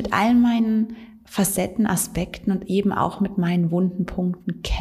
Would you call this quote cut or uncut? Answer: uncut